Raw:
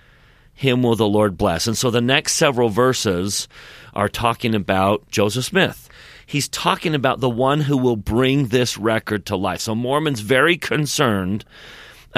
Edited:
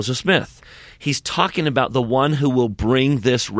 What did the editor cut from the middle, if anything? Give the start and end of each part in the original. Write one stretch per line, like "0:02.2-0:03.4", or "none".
none